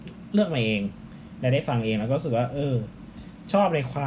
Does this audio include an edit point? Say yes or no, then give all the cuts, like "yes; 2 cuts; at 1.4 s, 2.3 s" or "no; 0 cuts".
no; 0 cuts